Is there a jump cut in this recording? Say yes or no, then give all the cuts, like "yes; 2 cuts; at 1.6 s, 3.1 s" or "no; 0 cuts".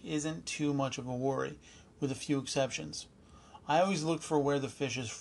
no; 0 cuts